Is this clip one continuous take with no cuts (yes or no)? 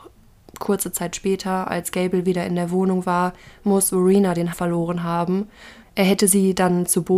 no